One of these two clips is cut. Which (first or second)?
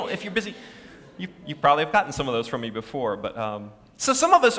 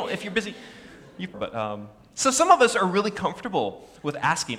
second